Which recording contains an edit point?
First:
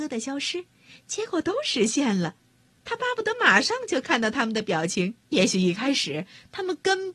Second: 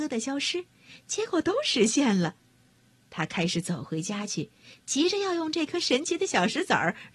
first; 2 cuts; at 2.8 s, 5.2 s

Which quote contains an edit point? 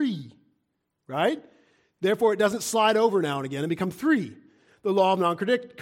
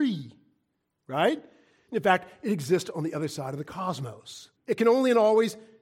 second; 2 cuts; at 1.9 s, 4.6 s

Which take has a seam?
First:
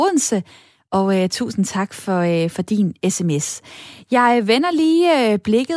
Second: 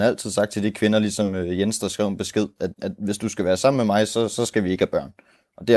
second; 1 cut; at 2.7 s

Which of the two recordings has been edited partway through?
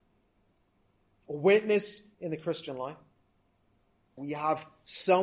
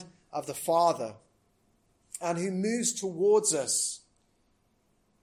first; 1 cut; at 4.2 s

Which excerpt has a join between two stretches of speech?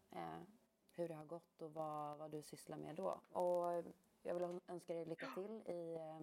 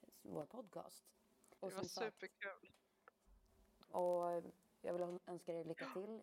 second; 2 cuts; at 1.6 s, 3.8 s

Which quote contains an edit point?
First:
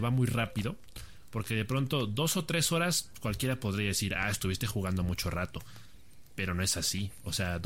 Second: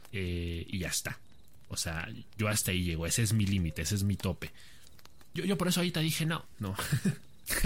second; 2 cuts; at 5.4 s, 6.6 s

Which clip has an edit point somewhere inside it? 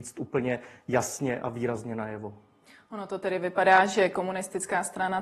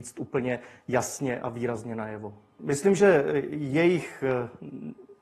second; 1 cut; at 2.6 s

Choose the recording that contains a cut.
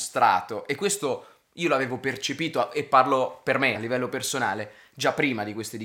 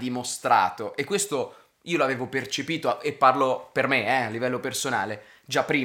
first; 1 cut; at 3.7 s

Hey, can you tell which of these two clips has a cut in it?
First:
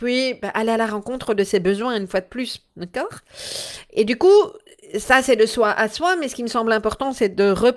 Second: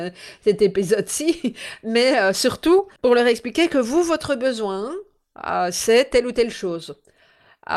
second; 1 cut; at 3.0 s

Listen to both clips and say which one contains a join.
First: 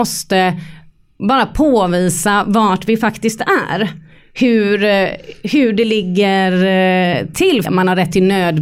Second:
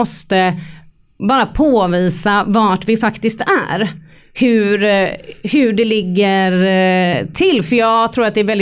first; 1 cut; at 7.6 s

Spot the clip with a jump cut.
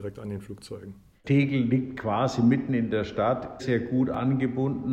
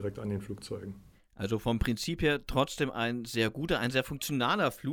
first; 2 cuts; at 1.2 s, 3.6 s

